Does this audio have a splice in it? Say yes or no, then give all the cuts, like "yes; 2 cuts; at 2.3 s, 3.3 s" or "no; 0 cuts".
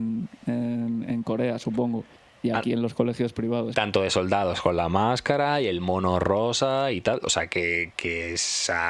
yes; 2 cuts; at 3.7 s, 7.9 s